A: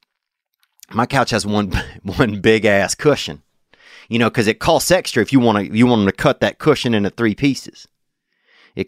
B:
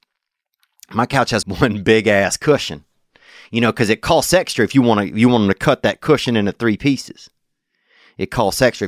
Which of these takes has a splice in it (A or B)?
B